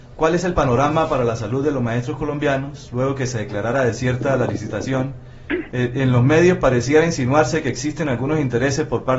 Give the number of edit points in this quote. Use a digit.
0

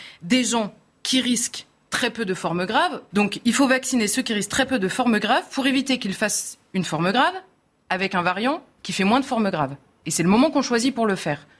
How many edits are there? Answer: 1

